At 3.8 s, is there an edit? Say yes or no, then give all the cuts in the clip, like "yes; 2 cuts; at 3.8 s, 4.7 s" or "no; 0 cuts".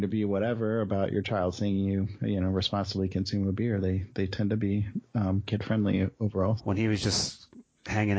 no; 2 cuts; at 5.5 s, 6.6 s